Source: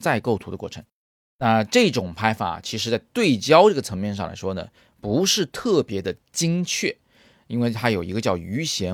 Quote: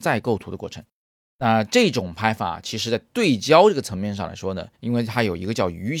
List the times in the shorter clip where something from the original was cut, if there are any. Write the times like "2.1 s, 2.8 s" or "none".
4.7 s